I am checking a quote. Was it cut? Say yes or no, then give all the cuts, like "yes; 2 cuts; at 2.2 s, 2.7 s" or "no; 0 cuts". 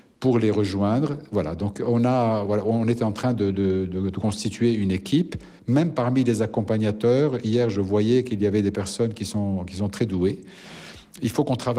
no; 0 cuts